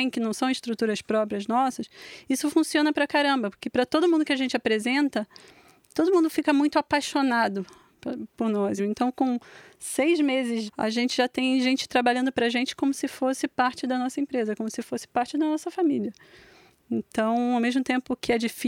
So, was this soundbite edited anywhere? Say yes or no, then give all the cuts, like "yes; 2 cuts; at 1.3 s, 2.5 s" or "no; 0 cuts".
yes; 2 cuts; at 8.8 s, 10.7 s